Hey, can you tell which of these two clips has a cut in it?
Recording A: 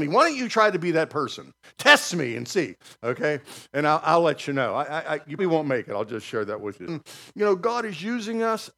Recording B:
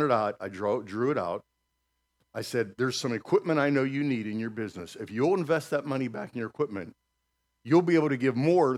A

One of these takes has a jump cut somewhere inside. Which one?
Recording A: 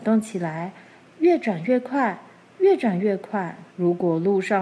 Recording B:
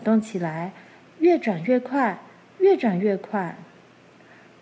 A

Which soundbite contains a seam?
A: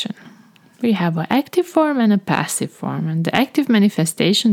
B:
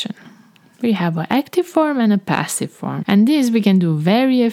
B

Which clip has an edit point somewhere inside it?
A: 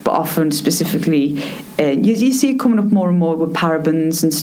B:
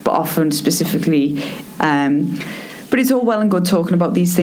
B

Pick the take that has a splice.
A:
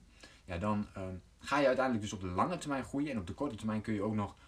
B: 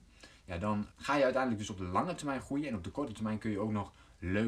B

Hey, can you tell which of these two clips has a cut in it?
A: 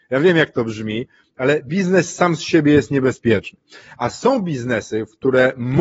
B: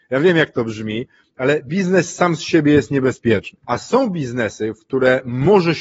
B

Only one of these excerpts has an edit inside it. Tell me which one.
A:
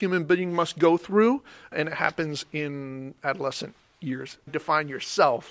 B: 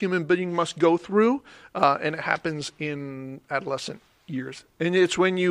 A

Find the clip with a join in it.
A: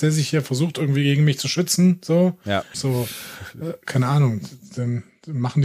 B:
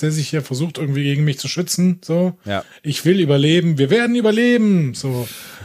A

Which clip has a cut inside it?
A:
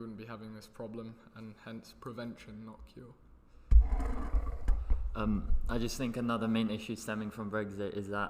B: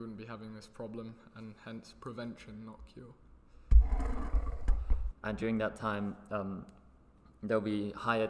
B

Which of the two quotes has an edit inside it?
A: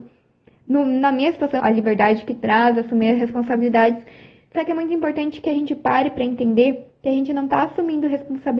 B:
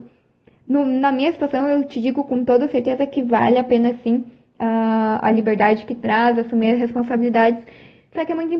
A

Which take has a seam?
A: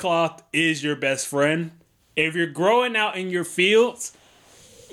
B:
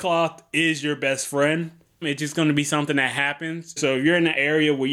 B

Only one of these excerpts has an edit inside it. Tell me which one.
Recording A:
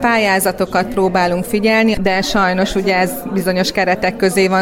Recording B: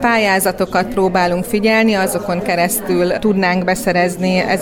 A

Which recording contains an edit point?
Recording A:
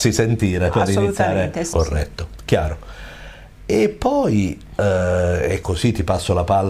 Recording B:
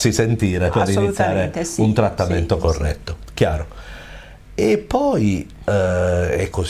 A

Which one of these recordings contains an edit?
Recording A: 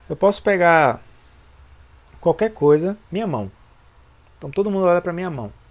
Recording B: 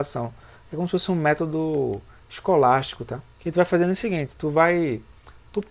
A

